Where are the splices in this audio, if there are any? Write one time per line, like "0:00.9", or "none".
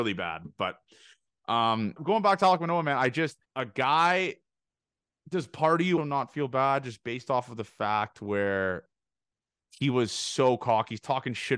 0:02.0
0:03.5
0:06.0